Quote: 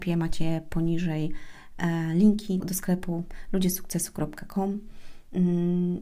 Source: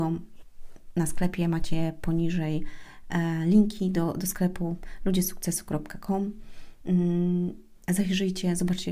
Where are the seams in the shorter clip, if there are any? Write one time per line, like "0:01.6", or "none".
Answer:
0:02.6

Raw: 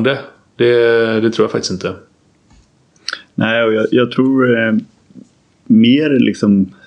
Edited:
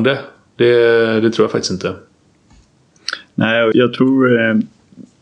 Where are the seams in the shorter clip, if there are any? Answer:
0:03.7

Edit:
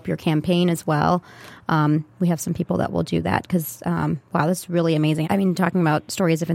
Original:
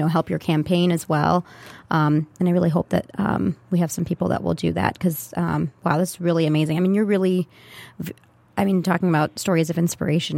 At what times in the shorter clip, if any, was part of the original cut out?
0:02.1
0:05.2

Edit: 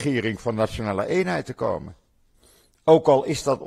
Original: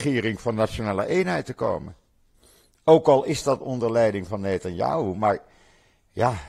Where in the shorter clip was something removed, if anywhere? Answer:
none

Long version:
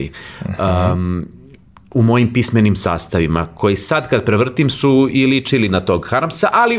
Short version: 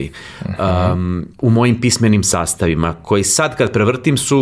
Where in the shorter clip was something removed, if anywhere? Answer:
0:01.3

